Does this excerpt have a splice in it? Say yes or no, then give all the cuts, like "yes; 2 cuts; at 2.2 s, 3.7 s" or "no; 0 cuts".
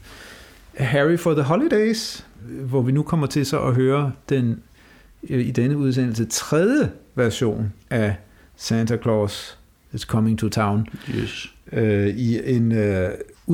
no; 0 cuts